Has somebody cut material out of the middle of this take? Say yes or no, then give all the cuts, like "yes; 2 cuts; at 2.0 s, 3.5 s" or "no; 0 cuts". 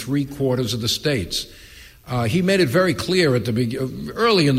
no; 0 cuts